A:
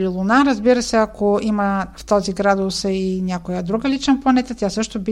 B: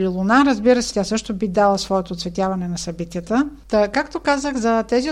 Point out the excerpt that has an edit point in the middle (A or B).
B